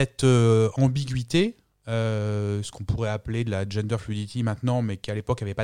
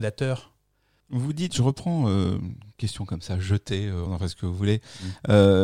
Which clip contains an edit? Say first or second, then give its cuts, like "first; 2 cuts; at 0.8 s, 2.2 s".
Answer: second; 2 cuts; at 1.0 s, 4.1 s